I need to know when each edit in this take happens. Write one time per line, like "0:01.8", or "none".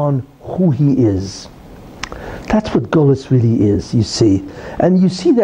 none